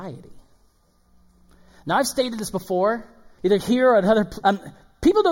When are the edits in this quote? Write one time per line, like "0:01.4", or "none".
0:03.4
0:04.4